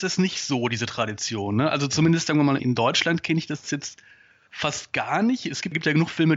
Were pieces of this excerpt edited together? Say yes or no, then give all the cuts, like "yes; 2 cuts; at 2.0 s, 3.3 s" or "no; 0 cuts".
no; 0 cuts